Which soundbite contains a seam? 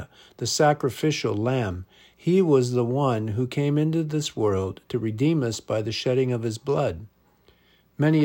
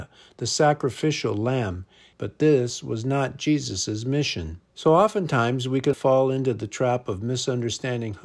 second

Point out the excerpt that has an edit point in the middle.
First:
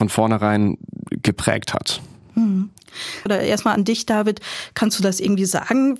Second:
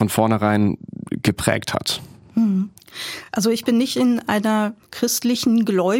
first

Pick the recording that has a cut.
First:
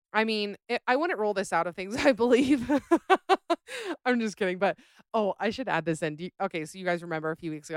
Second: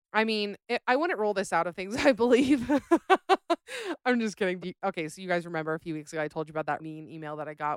second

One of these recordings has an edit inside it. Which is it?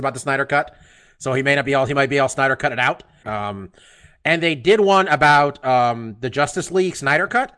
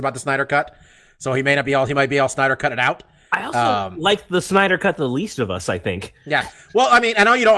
first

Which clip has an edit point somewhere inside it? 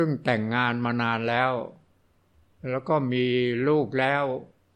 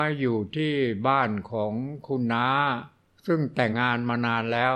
second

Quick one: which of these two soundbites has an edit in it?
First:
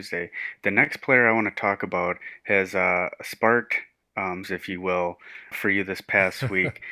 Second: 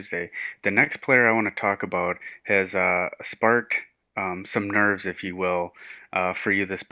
first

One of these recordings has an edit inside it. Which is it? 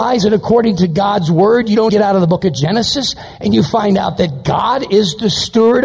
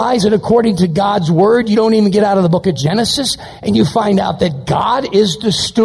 first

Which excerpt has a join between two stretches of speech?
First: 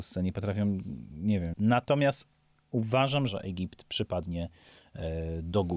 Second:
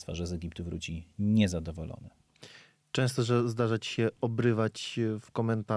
first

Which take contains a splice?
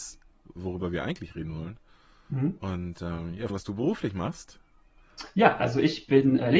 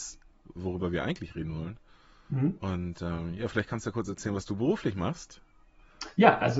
first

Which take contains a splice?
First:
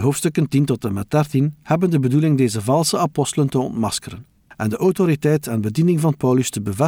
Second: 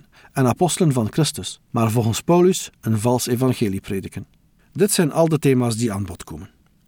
second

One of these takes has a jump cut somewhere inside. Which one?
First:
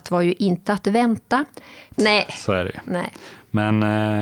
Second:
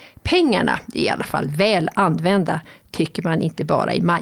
first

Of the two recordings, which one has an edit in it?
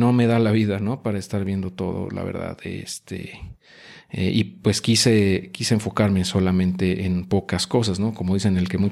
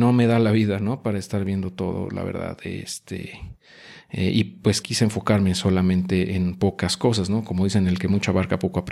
second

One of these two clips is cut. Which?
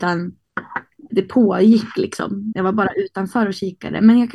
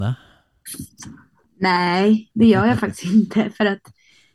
first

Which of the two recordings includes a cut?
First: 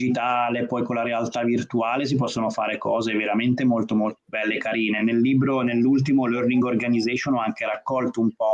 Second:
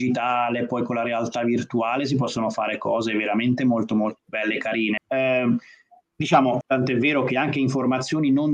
second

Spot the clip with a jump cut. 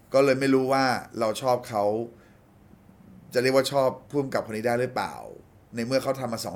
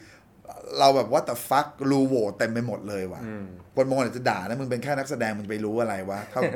second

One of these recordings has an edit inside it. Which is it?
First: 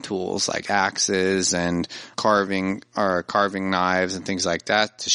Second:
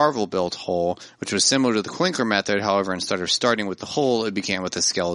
first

